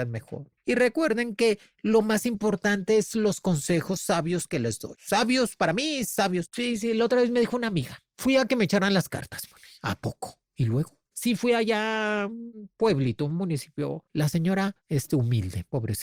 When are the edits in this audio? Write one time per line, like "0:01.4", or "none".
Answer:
none